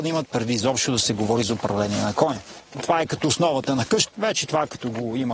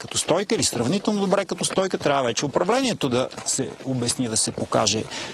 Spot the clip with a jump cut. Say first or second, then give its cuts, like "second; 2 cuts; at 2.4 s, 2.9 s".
first; 2 cuts; at 2.7 s, 4.1 s